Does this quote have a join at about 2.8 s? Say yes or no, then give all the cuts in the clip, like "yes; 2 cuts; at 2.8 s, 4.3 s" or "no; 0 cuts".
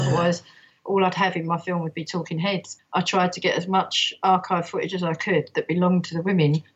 yes; 1 cut; at 2.8 s